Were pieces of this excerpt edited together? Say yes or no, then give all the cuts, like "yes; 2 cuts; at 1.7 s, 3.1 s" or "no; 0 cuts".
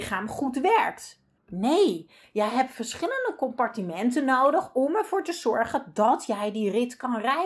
yes; 1 cut; at 1.4 s